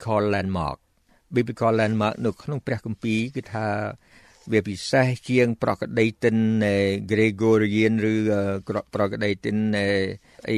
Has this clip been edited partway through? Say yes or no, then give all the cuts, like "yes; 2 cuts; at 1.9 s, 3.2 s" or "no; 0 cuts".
no; 0 cuts